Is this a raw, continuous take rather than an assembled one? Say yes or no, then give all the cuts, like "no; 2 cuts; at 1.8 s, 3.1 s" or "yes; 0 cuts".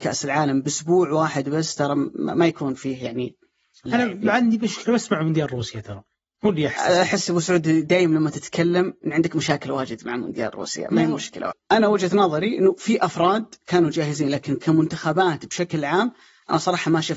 no; 2 cuts; at 3.9 s, 11.5 s